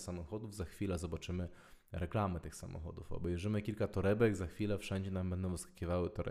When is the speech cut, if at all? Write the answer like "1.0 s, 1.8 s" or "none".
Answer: none